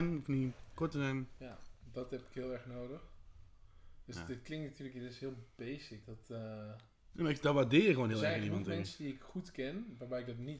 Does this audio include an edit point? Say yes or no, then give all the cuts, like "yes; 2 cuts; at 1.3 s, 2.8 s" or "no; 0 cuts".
yes; 1 cut; at 6.0 s